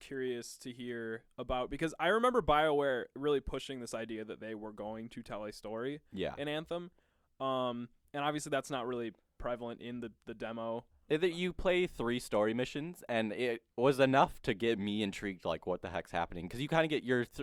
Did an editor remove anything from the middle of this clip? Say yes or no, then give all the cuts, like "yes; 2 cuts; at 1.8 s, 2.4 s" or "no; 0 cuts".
no; 0 cuts